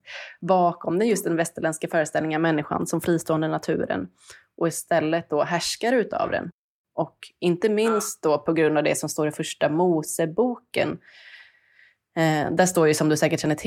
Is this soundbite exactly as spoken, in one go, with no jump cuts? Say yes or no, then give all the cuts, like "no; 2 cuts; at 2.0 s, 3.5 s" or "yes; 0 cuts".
yes; 0 cuts